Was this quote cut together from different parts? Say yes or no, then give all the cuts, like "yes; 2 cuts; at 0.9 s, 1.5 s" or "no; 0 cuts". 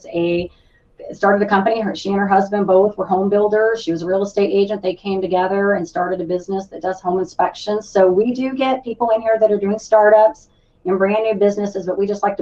no; 0 cuts